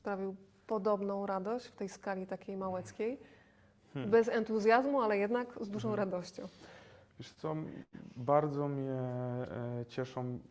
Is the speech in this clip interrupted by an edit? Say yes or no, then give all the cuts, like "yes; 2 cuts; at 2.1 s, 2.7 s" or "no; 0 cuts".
no; 0 cuts